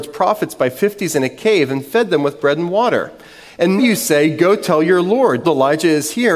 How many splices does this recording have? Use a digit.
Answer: 2